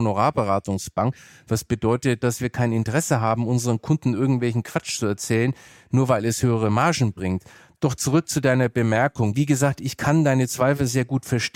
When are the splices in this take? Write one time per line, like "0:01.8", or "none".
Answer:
0:02.2